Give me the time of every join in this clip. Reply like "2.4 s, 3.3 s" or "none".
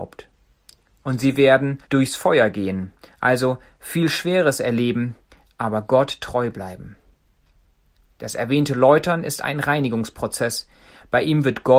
1.8 s

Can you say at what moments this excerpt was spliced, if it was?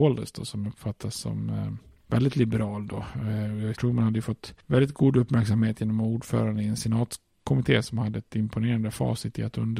3.7 s

